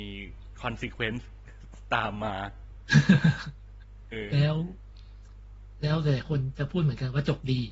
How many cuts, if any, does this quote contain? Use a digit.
1